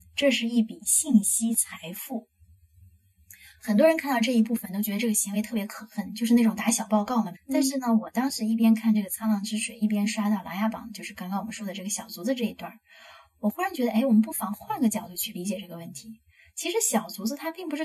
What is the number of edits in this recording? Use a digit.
1